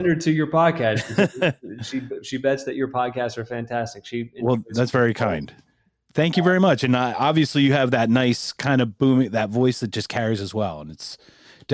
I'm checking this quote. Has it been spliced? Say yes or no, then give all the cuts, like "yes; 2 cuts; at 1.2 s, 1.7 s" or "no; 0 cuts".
no; 0 cuts